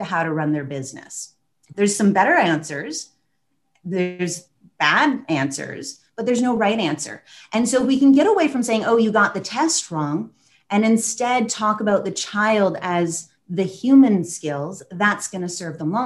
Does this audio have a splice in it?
yes; 1 cut; at 1.7 s

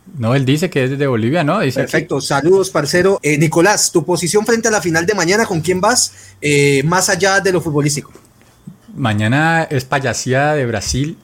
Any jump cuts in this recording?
yes; 1 cut; at 3.2 s

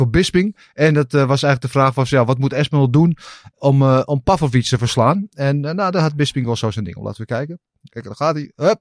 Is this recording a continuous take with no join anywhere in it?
yes; 0 cuts

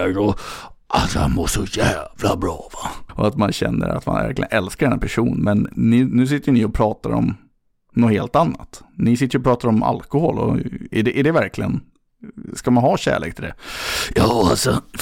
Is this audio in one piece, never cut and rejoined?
no; 1 cut; at 3.1 s

